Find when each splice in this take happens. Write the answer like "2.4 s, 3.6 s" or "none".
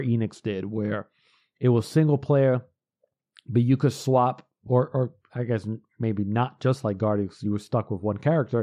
none